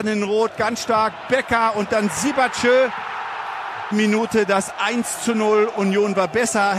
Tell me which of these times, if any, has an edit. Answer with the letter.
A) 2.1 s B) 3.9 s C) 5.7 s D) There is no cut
B